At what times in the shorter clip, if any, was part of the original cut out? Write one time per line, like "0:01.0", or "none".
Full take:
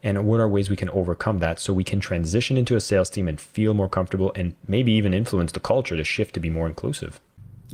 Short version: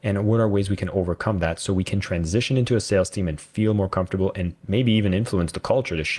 none